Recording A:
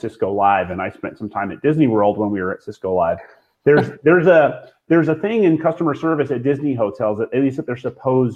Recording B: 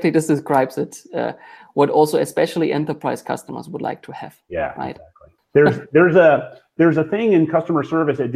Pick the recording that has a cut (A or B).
B